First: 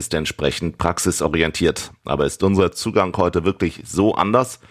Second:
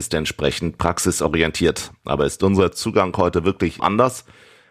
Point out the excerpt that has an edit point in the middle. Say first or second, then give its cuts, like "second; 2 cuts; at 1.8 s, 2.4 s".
second; 1 cut; at 3.8 s